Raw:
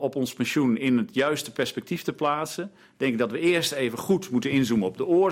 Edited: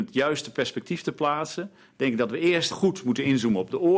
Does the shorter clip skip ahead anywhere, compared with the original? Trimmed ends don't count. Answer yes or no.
yes